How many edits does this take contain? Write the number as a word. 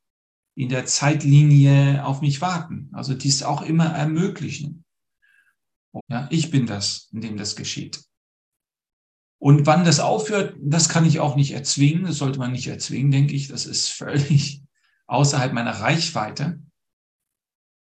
one